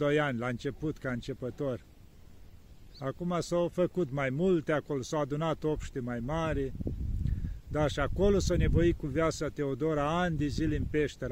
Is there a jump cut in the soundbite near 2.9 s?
yes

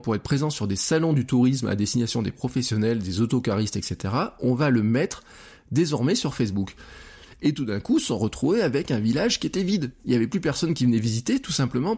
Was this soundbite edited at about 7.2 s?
yes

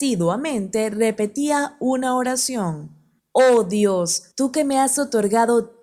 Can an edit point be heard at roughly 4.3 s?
yes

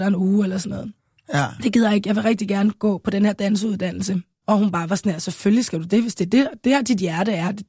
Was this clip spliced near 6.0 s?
no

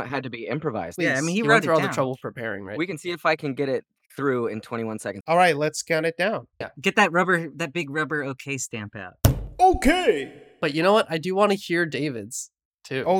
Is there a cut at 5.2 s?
yes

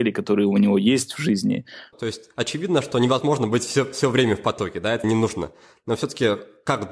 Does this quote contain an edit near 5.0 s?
yes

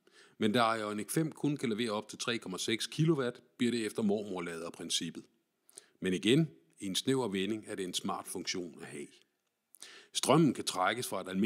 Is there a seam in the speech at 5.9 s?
no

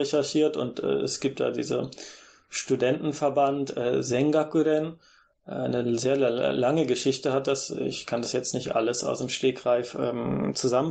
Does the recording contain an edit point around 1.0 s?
no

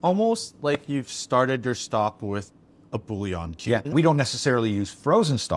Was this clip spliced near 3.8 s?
yes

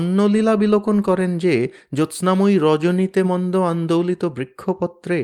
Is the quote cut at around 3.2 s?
yes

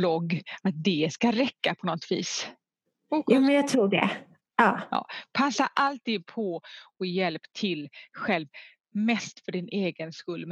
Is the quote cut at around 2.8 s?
no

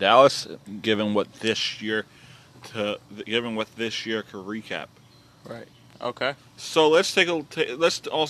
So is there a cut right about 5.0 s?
no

